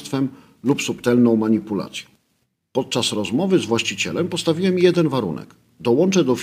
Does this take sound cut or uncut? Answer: cut